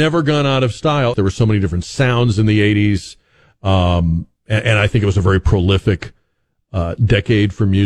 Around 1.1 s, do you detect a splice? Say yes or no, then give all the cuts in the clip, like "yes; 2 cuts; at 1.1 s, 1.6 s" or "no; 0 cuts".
yes; 1 cut; at 1.1 s